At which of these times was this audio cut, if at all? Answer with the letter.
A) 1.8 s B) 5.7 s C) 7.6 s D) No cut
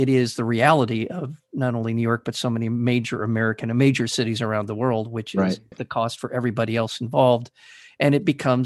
B